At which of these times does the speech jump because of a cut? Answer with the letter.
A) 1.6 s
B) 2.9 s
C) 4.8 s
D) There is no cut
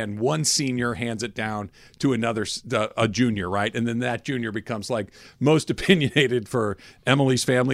D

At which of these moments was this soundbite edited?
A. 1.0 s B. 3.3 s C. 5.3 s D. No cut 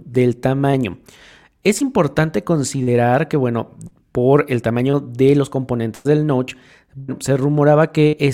D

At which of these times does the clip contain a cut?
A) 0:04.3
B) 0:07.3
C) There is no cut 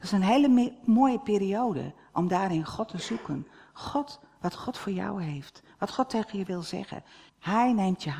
B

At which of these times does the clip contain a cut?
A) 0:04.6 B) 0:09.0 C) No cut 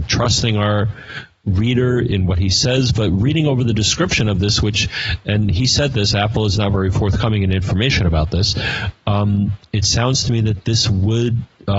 C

